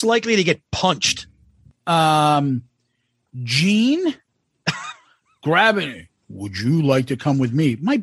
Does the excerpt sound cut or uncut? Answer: uncut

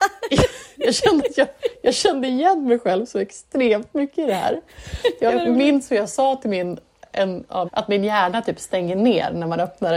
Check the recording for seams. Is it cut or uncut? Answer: cut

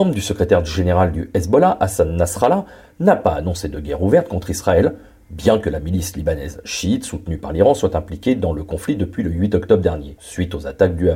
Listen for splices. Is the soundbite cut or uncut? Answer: uncut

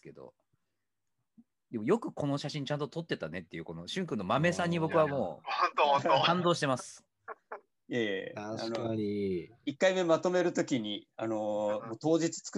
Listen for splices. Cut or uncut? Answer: uncut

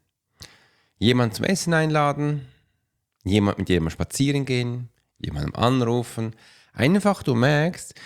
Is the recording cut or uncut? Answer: uncut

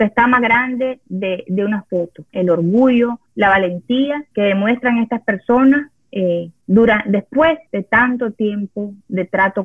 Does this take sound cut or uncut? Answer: cut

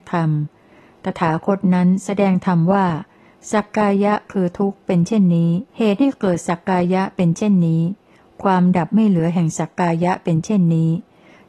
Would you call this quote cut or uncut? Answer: cut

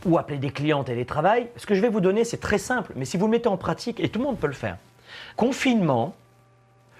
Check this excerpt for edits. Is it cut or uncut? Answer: cut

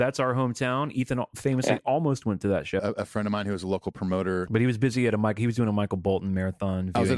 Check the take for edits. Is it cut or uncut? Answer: cut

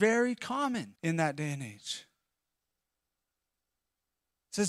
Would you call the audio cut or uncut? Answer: cut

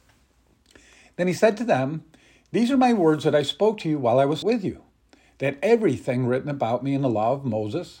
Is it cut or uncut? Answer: cut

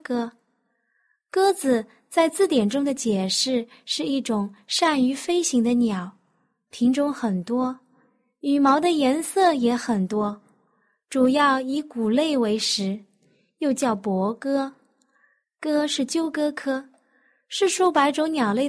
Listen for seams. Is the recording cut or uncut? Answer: cut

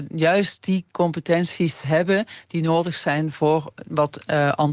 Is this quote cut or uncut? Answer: cut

